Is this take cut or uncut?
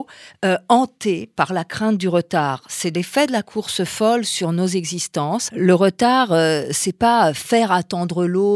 cut